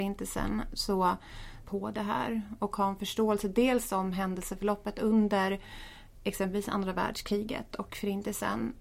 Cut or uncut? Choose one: cut